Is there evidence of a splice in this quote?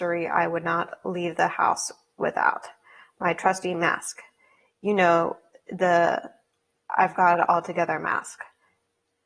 no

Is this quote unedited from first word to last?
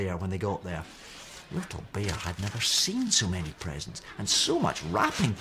yes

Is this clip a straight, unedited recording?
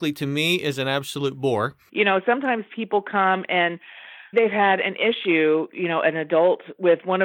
no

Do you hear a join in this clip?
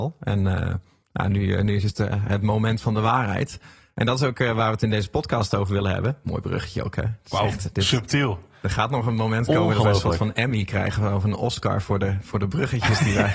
no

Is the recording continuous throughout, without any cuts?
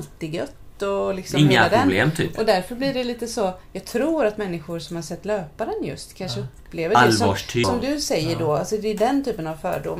no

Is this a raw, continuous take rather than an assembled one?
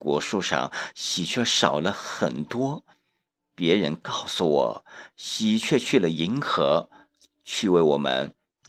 yes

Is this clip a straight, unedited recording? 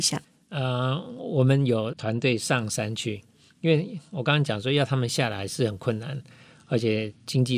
yes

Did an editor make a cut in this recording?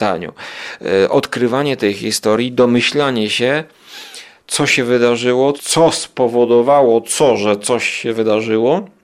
yes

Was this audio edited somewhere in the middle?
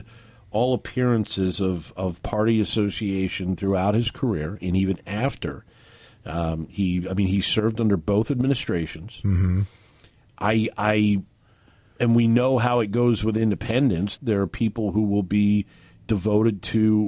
yes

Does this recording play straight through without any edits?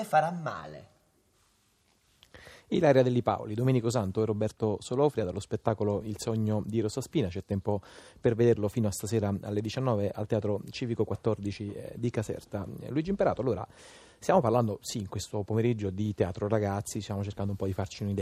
yes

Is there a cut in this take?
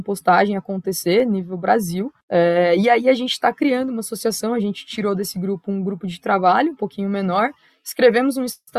yes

